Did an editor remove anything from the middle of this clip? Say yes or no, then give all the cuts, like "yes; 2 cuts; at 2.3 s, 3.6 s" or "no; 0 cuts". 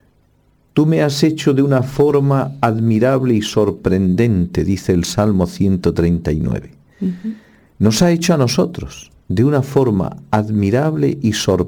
no; 0 cuts